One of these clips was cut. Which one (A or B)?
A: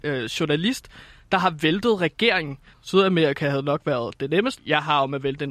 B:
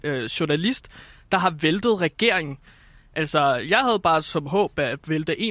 A